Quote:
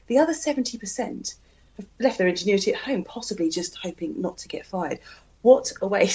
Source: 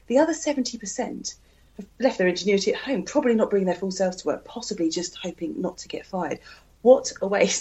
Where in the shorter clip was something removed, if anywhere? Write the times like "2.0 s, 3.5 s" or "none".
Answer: 3.0 s